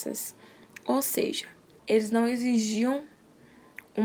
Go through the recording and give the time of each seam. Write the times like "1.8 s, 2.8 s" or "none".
1.8 s